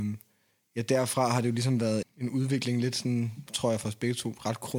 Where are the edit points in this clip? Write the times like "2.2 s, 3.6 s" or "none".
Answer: 2.0 s, 3.5 s